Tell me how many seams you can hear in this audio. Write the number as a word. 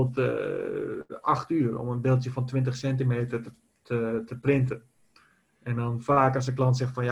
zero